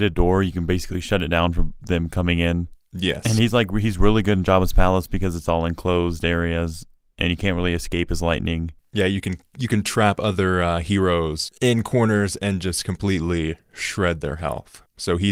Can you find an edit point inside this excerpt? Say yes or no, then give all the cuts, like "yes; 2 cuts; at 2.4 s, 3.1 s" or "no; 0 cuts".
no; 0 cuts